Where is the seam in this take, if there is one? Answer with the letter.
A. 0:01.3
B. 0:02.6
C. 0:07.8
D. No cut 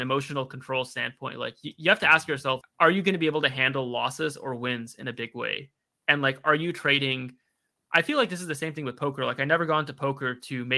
B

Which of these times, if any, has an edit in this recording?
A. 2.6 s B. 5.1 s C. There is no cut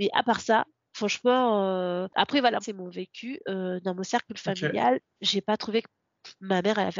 A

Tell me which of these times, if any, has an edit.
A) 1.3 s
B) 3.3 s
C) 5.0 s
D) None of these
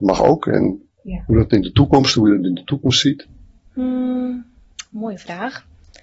D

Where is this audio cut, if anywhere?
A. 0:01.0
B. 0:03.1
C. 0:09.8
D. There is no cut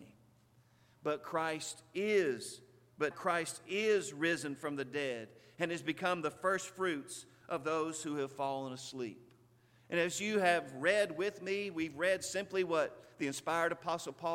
B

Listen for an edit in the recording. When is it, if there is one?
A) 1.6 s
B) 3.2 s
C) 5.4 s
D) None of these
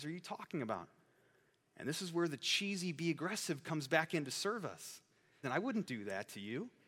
C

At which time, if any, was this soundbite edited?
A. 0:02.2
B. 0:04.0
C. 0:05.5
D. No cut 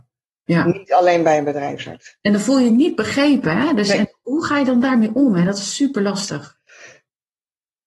A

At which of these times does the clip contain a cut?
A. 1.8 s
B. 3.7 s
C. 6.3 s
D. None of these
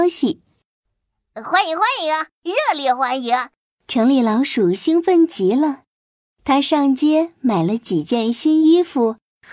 B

